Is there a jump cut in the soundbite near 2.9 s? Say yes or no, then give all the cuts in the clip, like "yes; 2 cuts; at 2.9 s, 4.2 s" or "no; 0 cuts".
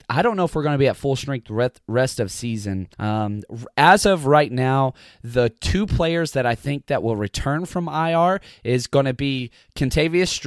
yes; 1 cut; at 2.9 s